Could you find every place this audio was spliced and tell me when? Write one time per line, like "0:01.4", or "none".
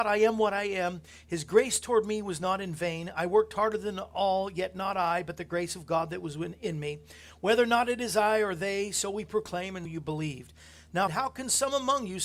0:09.9
0:11.1